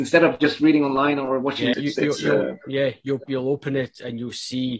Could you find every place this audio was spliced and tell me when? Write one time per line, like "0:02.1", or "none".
0:01.7
0:03.3